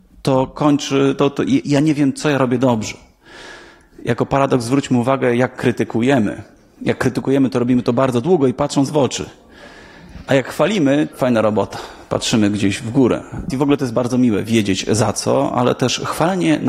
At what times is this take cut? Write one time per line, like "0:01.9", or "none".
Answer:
0:11.1
0:13.5